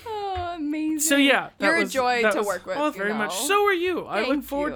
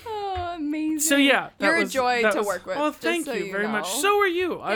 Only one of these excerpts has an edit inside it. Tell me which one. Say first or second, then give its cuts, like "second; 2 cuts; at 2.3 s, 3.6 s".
first; 1 cut; at 2.9 s